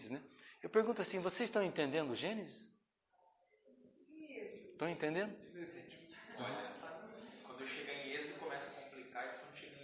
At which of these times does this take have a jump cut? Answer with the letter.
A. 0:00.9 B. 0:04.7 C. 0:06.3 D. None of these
D